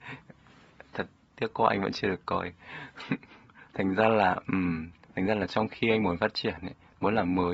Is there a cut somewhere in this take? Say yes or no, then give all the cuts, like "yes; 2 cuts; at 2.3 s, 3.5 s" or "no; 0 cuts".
no; 0 cuts